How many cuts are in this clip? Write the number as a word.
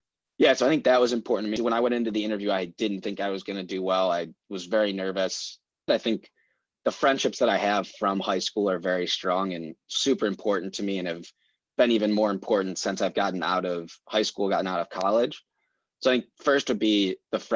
two